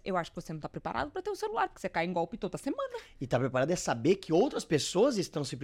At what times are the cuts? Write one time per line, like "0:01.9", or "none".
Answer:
none